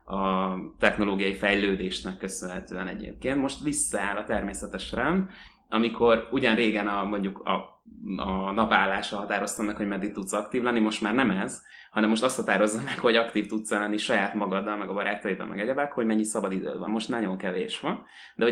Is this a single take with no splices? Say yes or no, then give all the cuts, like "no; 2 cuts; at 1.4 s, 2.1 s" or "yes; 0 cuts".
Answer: yes; 0 cuts